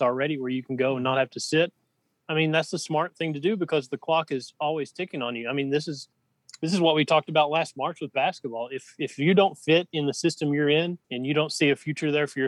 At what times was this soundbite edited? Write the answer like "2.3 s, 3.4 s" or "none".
11.0 s